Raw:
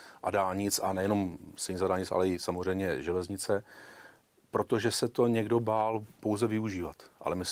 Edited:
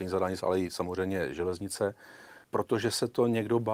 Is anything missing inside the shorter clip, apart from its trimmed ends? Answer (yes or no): yes